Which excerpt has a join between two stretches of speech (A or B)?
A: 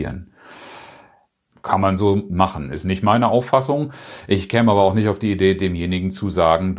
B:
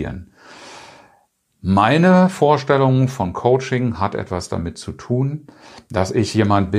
A